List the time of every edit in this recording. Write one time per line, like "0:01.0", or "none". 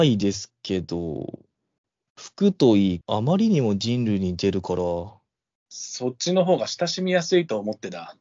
0:03.0